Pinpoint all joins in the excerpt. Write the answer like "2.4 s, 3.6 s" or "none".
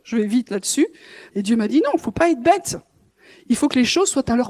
1.3 s